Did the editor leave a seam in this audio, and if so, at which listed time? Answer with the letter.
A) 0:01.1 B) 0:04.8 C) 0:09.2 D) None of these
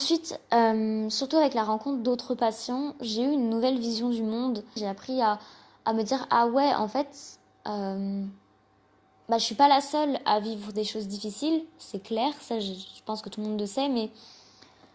B